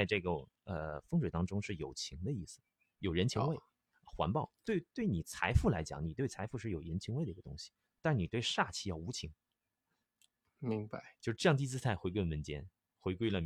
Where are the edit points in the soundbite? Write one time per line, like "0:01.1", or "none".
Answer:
none